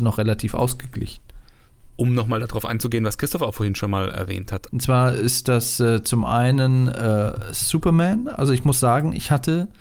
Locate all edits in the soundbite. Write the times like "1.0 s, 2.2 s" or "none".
4.7 s